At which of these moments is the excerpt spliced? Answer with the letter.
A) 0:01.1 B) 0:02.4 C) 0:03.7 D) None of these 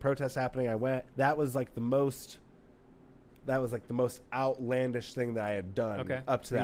A